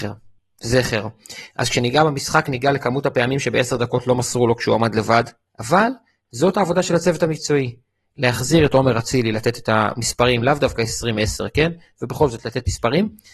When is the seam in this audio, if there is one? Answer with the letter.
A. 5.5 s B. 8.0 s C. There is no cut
A